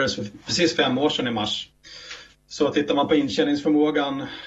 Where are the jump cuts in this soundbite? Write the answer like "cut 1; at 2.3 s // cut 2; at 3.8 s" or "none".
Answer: none